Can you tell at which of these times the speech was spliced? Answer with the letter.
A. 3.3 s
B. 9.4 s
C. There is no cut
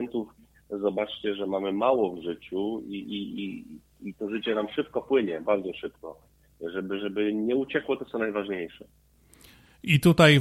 C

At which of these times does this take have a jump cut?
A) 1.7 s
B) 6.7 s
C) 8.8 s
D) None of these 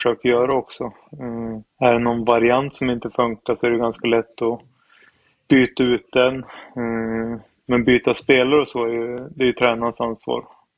A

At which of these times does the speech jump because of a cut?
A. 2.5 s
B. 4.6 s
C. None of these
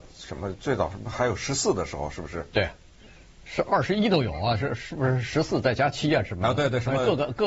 C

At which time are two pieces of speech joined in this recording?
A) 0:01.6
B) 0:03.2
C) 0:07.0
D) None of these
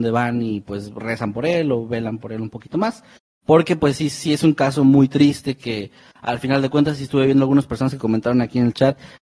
D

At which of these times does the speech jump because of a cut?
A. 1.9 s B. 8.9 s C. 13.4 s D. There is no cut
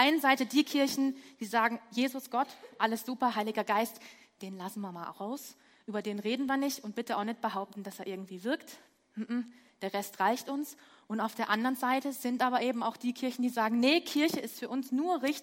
D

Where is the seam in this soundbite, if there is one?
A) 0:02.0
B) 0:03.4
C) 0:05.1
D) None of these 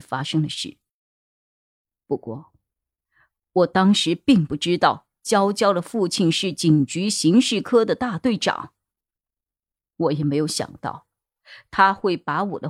D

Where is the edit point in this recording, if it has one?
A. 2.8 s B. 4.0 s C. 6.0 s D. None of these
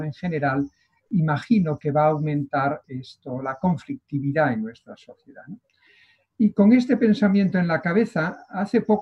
A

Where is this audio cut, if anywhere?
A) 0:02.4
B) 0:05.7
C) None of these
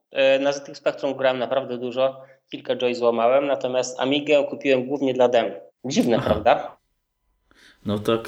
B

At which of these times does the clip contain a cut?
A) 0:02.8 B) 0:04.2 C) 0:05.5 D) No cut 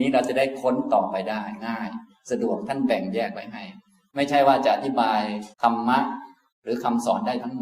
C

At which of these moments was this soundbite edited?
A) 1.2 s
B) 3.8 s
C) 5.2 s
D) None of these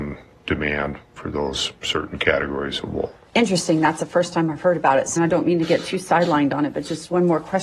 C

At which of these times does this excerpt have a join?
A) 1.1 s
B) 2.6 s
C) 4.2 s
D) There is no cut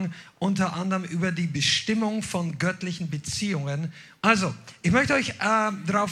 C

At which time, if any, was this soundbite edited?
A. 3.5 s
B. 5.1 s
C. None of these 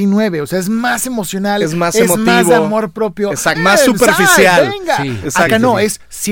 A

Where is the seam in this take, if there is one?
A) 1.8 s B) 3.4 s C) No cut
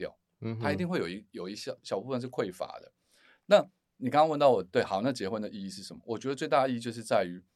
A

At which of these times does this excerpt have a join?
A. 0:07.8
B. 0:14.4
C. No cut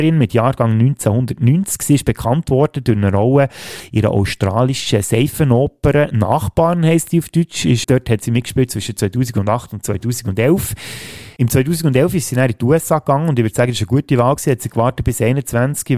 A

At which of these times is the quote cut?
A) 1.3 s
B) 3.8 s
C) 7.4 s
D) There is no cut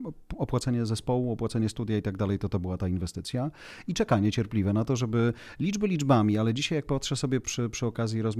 C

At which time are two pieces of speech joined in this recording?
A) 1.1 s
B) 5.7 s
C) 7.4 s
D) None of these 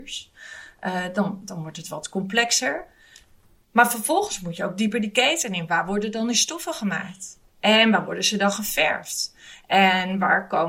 D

